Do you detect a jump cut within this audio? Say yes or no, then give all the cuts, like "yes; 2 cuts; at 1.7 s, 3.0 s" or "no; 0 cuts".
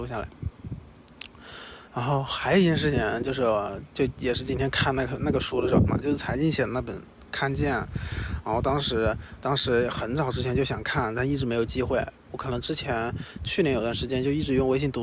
yes; 1 cut; at 5.9 s